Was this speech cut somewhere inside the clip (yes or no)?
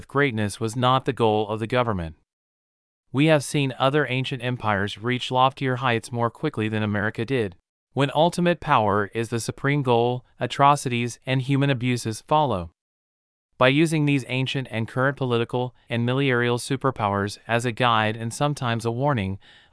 yes